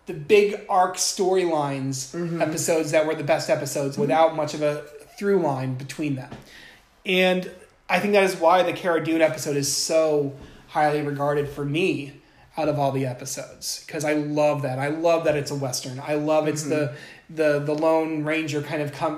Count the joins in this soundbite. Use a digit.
1